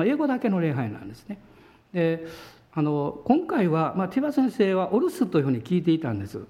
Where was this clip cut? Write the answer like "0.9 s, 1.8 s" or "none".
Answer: 1.8 s

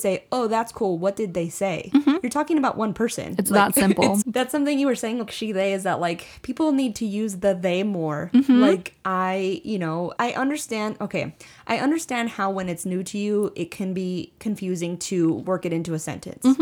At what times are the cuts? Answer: 4.2 s, 5.3 s, 10.2 s

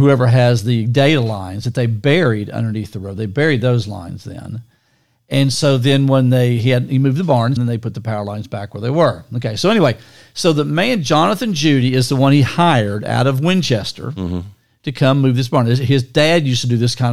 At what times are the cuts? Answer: 7.6 s

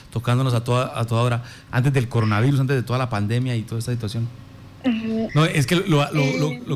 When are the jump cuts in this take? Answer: 1.7 s, 5.3 s

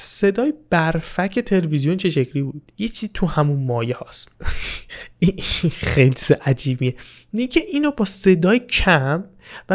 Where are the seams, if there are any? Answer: 4.3 s

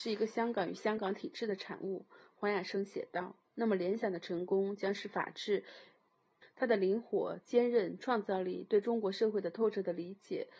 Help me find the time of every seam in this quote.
6.4 s

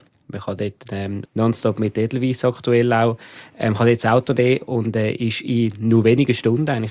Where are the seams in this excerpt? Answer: 1.2 s

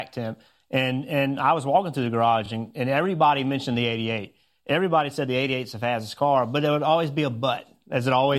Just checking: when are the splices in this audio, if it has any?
none

